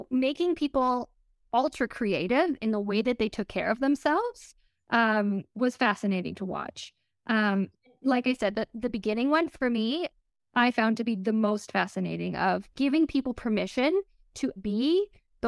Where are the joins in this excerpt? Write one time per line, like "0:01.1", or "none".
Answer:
0:05.5
0:12.7
0:14.6